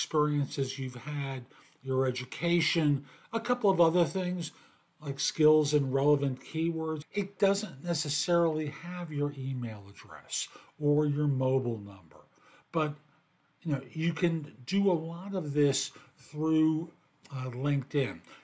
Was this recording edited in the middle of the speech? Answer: yes; 1 cut; at 7.0 s

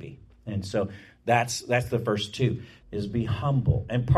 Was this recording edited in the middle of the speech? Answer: yes; 1 cut; at 2.8 s

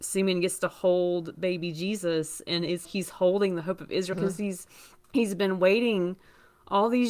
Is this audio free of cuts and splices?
no; 2 cuts; at 2.8 s, 4.1 s

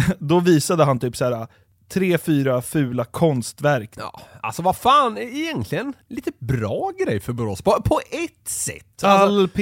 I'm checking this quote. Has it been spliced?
yes; 2 cuts; at 4.0 s, 6.0 s

